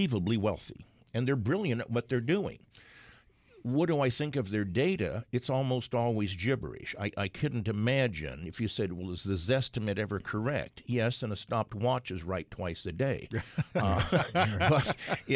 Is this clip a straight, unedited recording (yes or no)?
yes